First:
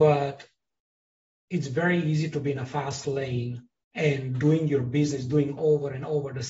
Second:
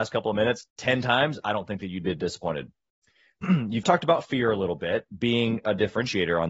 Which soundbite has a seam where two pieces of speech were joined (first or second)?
second